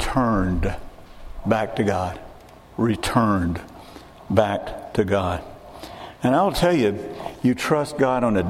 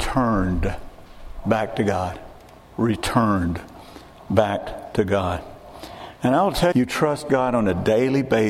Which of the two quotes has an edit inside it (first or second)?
second